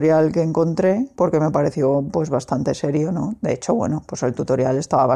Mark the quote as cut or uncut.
uncut